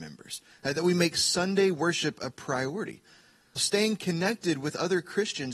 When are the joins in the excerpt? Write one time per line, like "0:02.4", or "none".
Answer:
0:03.6